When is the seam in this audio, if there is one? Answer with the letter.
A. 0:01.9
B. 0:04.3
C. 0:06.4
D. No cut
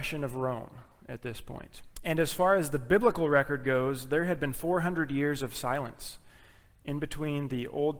A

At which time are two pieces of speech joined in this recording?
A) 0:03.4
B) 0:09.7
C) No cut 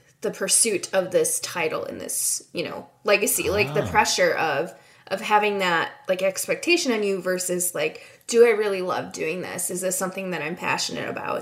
C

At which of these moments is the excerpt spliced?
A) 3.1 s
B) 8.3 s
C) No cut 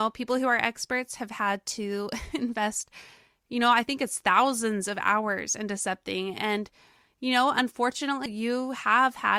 B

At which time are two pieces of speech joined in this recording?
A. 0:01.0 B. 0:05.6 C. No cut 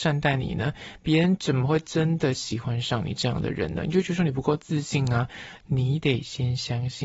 B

